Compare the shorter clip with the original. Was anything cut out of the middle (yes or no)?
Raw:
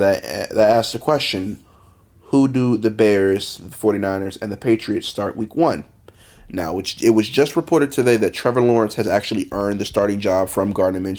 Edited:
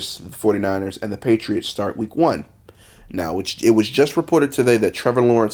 no